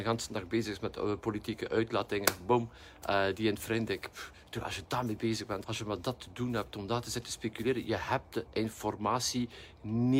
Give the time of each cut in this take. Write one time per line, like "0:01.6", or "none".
0:05.6